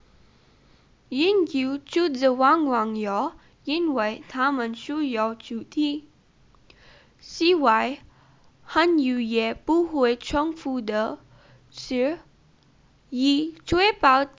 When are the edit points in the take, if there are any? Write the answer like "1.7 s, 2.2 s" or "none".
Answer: none